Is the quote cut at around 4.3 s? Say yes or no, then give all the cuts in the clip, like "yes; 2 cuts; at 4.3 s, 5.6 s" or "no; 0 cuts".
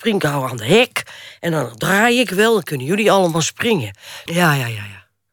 yes; 1 cut; at 4.3 s